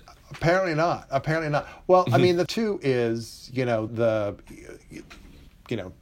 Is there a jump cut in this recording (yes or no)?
yes